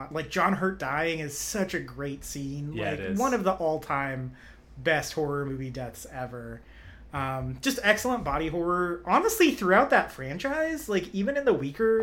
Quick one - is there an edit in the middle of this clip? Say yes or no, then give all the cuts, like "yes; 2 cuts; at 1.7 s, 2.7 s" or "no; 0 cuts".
no; 0 cuts